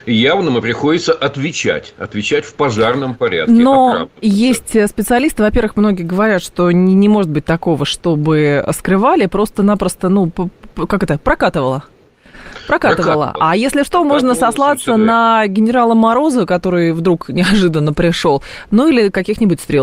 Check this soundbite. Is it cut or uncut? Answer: uncut